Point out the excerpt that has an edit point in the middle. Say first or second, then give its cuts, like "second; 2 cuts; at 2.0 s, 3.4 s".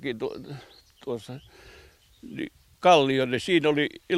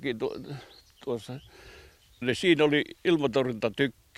second; 1 cut; at 2.2 s